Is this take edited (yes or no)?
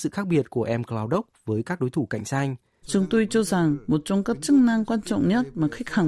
yes